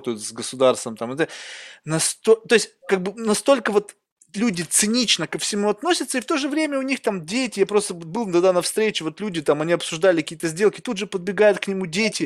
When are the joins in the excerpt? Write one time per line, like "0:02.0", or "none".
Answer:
none